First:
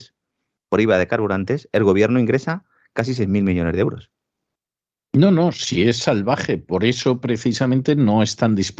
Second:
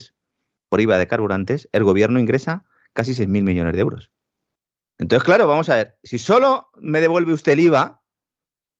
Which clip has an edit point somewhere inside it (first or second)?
second